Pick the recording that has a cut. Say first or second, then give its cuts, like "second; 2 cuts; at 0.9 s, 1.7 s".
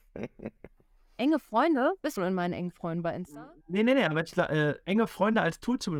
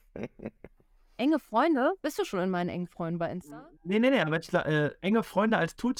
first; 1 cut; at 2.2 s